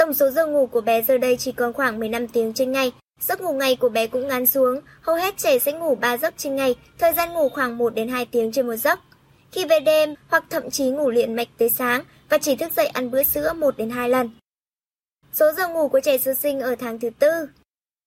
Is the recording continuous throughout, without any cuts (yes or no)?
no